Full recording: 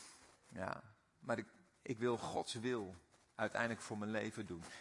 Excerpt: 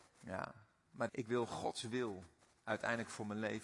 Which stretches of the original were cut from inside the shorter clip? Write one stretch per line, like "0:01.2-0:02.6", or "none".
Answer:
0:01.4-0:01.8